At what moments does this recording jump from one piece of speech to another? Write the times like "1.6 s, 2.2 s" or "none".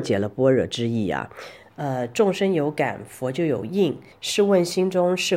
1.6 s, 4.1 s